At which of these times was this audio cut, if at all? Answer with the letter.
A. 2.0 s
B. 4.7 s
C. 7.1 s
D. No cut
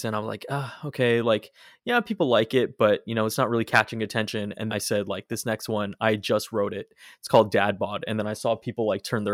B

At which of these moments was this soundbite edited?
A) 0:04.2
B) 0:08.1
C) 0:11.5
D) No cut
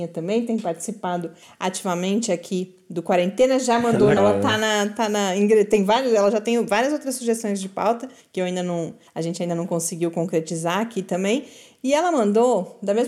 A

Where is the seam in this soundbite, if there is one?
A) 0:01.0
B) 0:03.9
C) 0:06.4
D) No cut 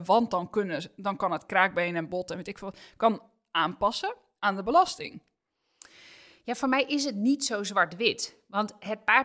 D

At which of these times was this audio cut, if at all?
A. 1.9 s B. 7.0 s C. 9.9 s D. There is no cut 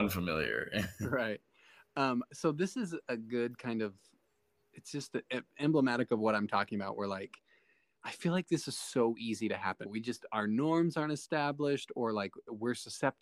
C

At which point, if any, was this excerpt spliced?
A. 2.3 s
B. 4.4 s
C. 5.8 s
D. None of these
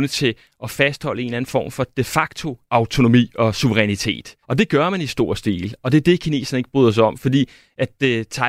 B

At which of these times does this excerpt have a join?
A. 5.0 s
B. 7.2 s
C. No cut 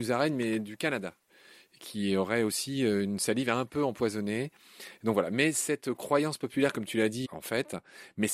B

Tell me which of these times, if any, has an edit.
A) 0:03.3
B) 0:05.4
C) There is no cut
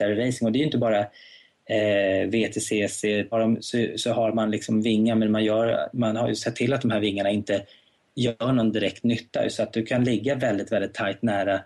A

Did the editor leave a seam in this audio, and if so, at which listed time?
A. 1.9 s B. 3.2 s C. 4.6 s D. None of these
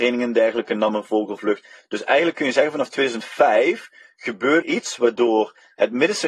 C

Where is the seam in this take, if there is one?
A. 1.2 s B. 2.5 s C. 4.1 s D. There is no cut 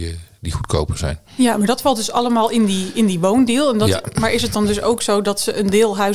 D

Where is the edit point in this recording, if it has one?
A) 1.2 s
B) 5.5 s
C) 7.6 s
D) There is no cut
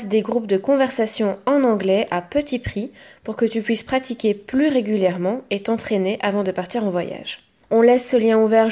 C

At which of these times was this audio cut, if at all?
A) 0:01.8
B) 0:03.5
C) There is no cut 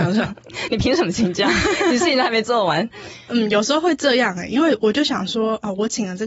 C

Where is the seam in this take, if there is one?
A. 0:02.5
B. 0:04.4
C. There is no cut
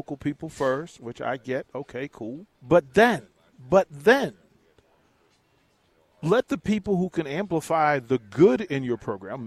A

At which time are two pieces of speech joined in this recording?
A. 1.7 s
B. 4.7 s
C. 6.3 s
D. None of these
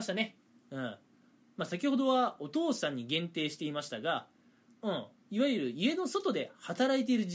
B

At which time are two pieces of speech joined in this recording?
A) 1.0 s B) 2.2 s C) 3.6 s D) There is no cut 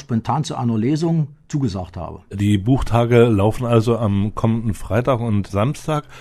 D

